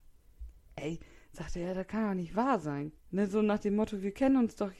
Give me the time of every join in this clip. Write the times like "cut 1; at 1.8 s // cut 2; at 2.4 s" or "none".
cut 1; at 3.0 s

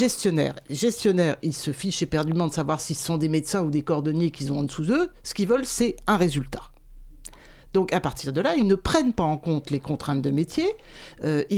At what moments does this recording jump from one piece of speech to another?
none

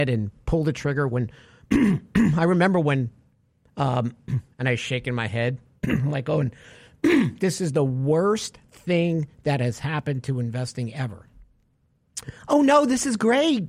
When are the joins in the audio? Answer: cut 1; at 4.5 s

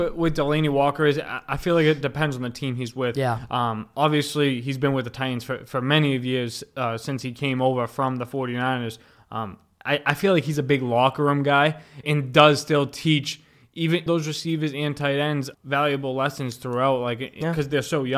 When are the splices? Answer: cut 1; at 12.0 s // cut 2; at 14.1 s // cut 3; at 15.5 s

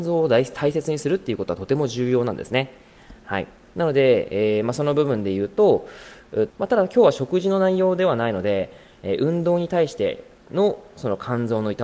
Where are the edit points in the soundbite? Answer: cut 1; at 6.5 s // cut 2; at 10.4 s

